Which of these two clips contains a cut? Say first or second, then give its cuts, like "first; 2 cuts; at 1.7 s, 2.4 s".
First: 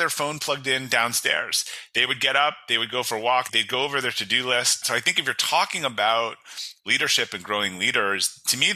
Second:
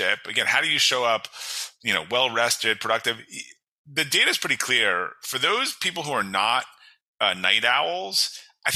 first; 2 cuts; at 3.5 s, 4.8 s